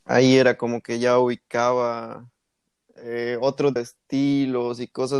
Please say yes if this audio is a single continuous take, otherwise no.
no